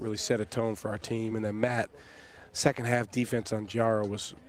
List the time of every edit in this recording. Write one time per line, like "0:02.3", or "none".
none

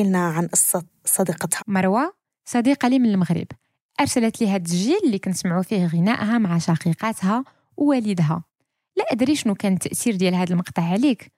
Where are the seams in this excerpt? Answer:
0:01.6

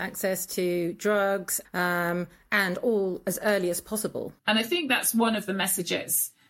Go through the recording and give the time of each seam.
0:01.6
0:04.4

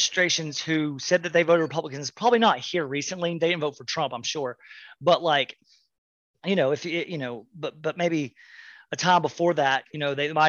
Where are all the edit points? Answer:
none

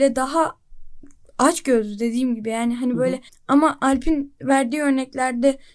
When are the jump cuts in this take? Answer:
0:03.3

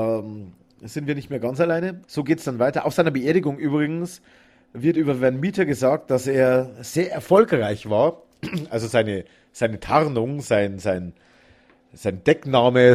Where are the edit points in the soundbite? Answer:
0:02.0

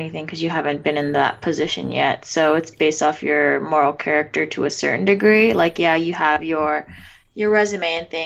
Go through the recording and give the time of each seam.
none

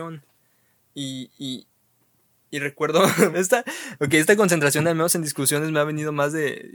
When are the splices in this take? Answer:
0:03.3

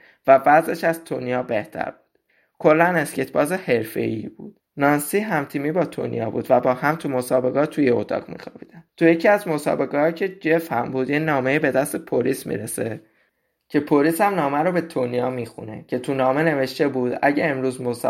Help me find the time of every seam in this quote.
0:08.9

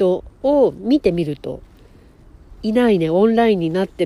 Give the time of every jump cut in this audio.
0:02.6

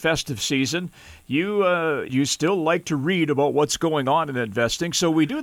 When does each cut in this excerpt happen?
0:02.1

